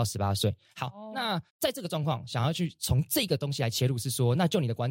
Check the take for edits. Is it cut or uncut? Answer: cut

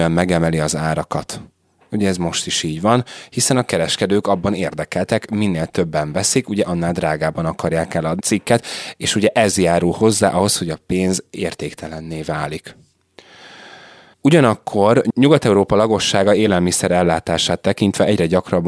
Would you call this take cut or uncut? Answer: cut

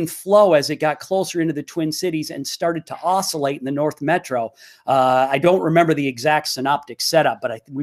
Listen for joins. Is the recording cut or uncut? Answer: uncut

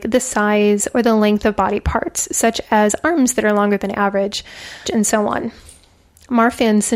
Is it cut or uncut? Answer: cut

